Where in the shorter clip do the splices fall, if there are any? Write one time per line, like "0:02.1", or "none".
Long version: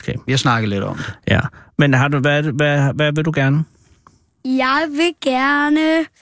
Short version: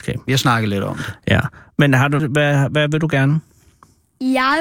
0:02.2